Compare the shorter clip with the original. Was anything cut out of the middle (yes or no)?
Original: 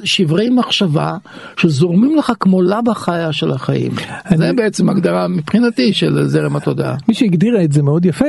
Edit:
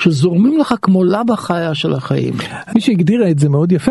yes